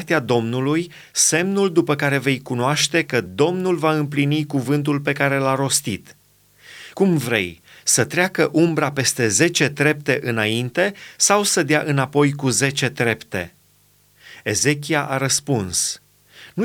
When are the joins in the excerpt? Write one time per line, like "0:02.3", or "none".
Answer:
none

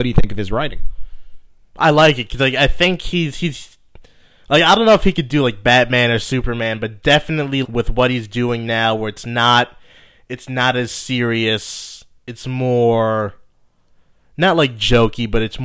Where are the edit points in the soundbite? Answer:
0:07.6

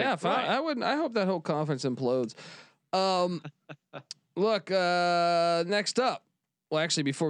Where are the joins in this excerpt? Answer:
none

